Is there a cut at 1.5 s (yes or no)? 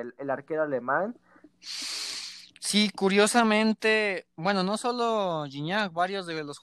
yes